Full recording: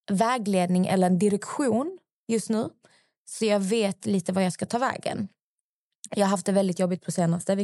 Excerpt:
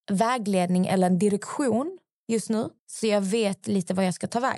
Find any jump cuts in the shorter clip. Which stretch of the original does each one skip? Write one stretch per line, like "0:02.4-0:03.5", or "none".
0:02.8-0:03.2